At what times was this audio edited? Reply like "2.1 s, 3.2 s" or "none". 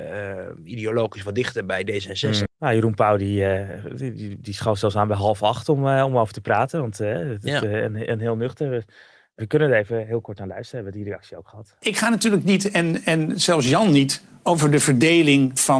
2.5 s